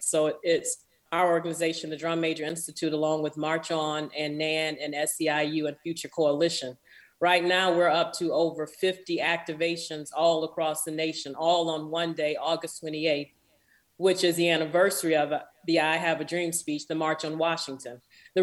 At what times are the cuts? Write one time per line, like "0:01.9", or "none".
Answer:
0:01.1

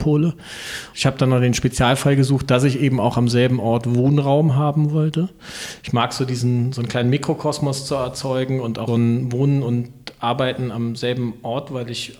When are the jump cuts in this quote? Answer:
0:00.9
0:08.9

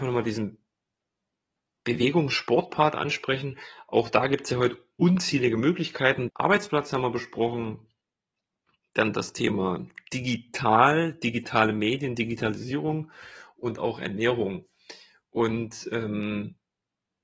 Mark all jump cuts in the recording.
0:06.3

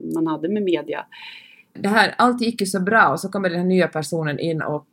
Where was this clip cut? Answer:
0:01.8

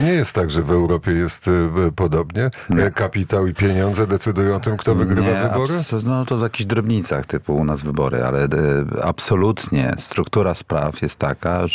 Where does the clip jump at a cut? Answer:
0:03.5

